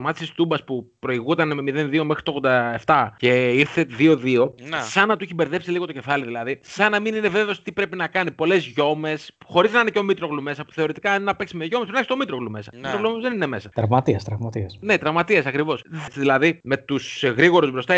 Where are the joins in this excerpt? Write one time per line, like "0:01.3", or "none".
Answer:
0:16.1